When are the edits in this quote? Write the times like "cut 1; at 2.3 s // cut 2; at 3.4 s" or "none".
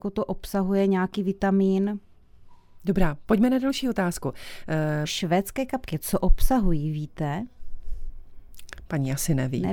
cut 1; at 5.0 s